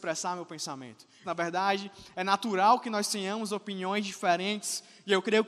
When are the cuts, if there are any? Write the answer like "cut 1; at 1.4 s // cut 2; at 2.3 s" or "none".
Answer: cut 1; at 1.2 s